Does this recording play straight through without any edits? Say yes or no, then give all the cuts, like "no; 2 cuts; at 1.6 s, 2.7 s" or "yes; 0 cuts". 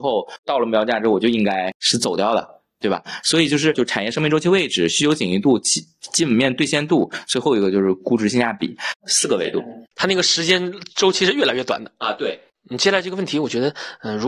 no; 1 cut; at 3.7 s